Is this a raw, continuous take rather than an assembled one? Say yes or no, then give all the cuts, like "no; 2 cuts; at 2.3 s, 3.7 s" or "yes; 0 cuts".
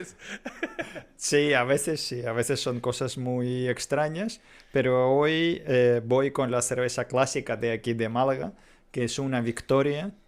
yes; 0 cuts